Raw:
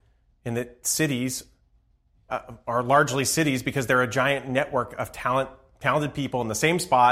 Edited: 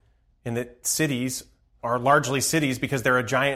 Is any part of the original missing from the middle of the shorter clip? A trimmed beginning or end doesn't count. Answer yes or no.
yes